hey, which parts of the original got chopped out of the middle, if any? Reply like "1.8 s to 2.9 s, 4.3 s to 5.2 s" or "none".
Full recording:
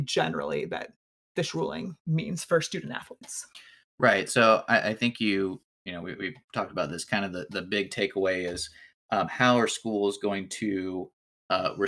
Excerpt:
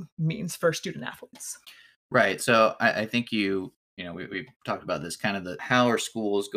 7.5 s to 9.3 s